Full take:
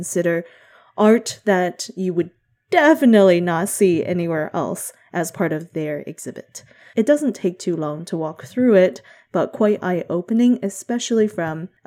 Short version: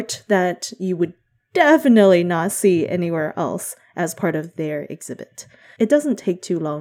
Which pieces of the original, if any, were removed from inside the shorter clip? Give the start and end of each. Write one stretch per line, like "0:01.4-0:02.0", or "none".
none